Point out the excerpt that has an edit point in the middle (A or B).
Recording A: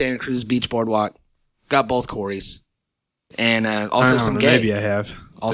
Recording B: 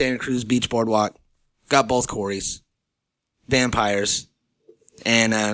A